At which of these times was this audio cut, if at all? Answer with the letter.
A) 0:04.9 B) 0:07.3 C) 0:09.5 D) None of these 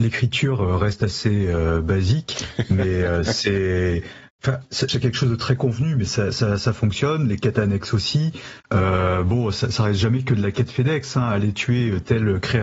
A